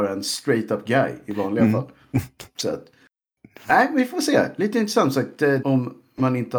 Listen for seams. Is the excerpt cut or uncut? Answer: cut